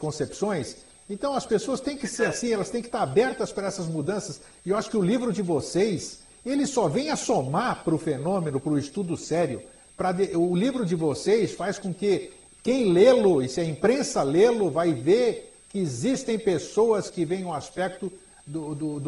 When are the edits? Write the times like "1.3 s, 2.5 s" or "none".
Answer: none